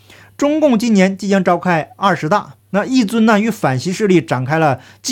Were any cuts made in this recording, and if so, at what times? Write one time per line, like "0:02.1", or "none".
0:02.6